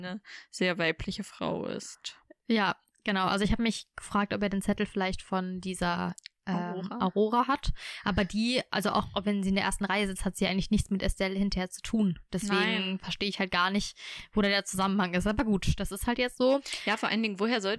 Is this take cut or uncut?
uncut